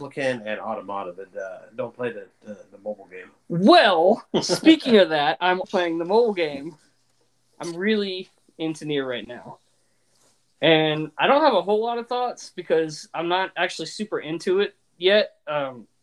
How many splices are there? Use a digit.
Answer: 1